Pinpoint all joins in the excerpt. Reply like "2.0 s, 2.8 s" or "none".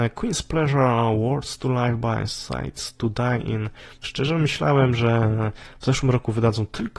4.0 s

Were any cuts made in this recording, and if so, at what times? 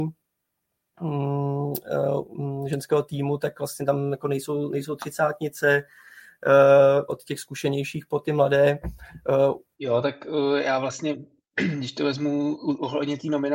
7.1 s, 9.7 s

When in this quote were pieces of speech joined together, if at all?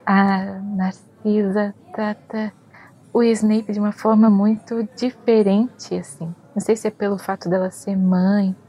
none

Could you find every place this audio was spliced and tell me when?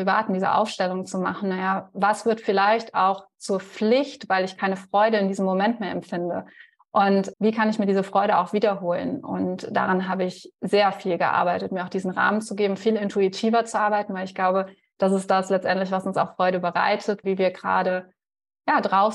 7.3 s, 17.2 s

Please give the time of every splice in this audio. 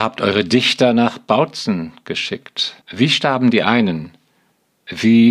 2.8 s

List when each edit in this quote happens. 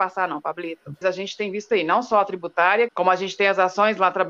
1.0 s, 2.9 s

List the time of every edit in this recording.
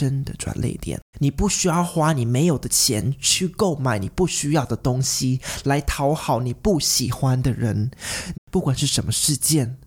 1.1 s, 8.3 s

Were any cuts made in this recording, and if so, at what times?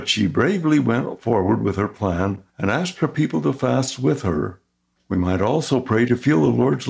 2.5 s, 5.0 s

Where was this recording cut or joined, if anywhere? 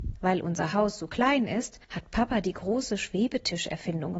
1.8 s

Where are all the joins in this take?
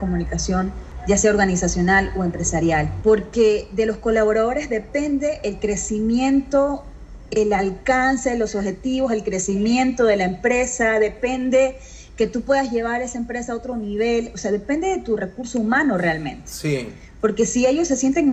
3.0 s

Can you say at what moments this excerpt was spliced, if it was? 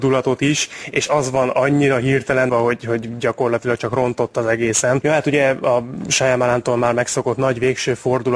2.5 s, 5.0 s

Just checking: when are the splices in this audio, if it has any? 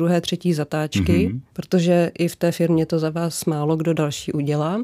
1.5 s

